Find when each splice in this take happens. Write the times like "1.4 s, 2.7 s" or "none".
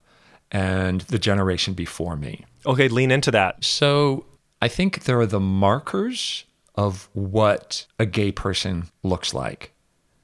3.6 s